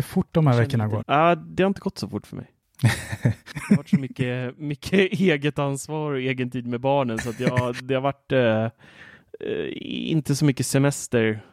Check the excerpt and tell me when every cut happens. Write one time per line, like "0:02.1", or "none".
0:01.0